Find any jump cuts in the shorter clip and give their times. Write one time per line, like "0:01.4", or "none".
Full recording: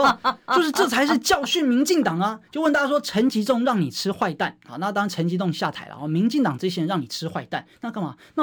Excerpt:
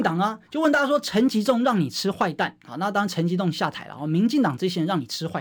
none